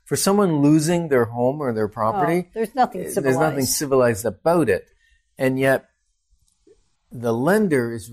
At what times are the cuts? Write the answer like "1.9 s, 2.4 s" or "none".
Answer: 7.0 s